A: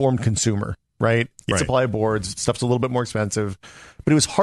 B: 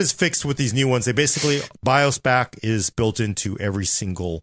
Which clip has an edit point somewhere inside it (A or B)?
A